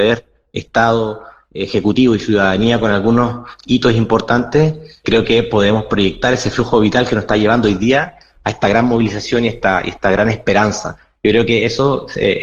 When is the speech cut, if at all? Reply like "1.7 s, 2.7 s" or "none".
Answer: 5.0 s